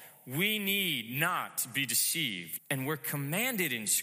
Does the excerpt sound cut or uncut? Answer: cut